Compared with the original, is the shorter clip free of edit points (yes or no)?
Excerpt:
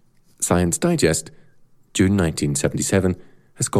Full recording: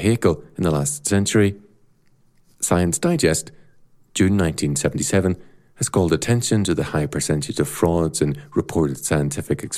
yes